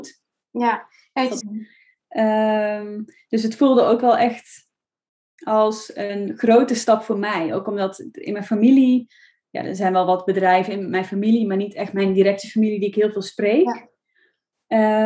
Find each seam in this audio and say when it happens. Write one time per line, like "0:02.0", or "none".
0:01.4